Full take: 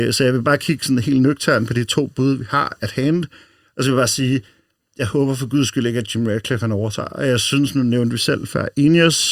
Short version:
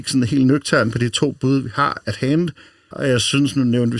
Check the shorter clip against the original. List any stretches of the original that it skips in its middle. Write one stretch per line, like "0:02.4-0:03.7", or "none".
0:03.7-0:07.1

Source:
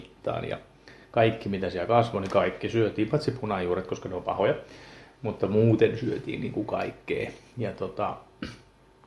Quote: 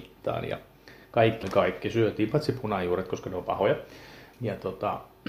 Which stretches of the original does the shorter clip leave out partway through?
0:01.4-0:02.2
0:05.1-0:07.5

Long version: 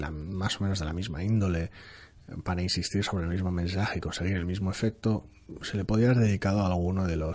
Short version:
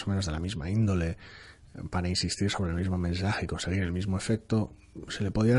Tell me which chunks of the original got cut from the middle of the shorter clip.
none

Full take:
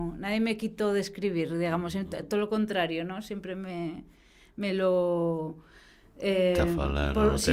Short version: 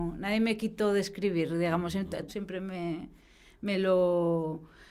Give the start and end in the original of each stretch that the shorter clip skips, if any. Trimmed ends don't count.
0:02.3-0:03.2

